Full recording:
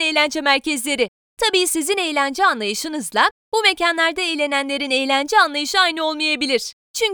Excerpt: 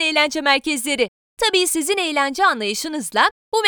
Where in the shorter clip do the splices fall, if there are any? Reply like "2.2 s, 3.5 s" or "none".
none